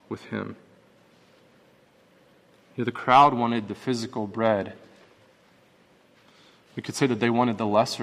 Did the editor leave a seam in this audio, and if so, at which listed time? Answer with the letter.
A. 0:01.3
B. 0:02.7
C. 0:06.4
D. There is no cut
D